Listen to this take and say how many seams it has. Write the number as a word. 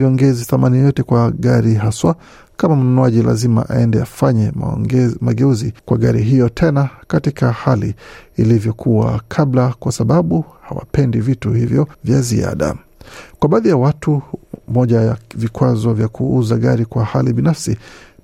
two